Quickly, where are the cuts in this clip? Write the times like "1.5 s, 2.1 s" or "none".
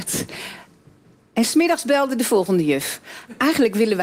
none